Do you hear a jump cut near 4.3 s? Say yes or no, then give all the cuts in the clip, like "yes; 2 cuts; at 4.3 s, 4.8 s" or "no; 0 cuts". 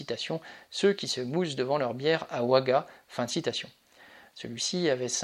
yes; 1 cut; at 4.3 s